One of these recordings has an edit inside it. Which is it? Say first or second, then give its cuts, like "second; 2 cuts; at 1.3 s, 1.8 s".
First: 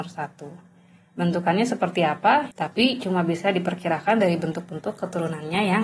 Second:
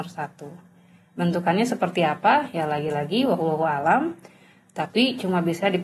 first; 1 cut; at 2.5 s